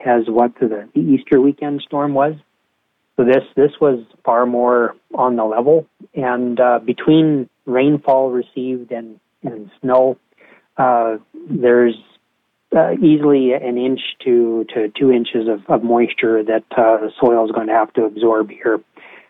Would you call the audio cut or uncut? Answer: uncut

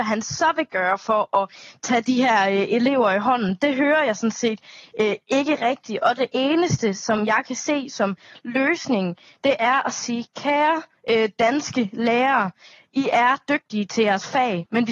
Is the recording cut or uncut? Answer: uncut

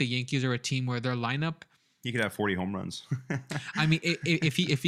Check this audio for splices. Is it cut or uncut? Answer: uncut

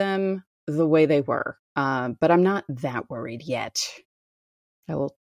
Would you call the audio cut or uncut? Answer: uncut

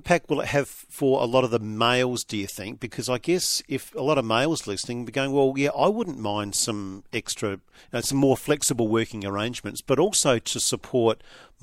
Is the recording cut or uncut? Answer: uncut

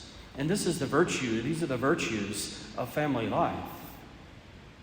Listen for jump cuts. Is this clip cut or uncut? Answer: uncut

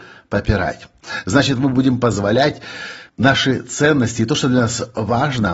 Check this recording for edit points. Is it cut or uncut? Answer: cut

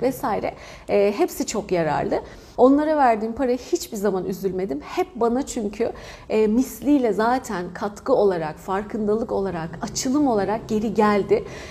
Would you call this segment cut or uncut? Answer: cut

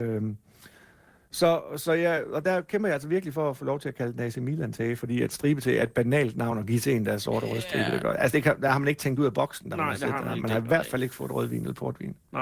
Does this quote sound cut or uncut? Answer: uncut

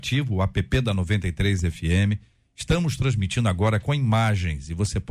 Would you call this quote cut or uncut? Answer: uncut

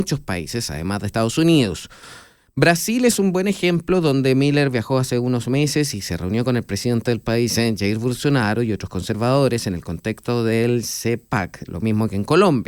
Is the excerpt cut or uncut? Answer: uncut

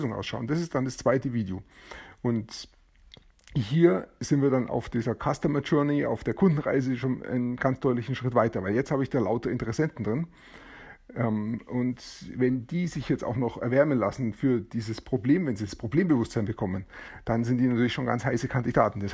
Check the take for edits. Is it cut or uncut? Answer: uncut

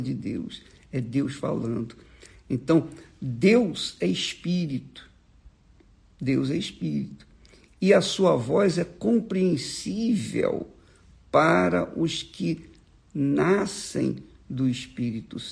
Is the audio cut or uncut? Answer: uncut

